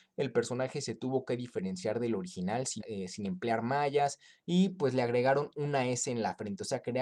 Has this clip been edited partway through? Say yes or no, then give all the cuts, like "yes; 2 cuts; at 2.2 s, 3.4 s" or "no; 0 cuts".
yes; 1 cut; at 2.8 s